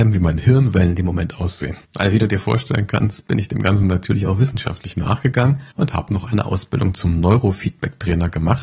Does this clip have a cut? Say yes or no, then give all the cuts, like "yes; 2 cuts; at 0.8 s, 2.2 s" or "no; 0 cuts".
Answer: no; 0 cuts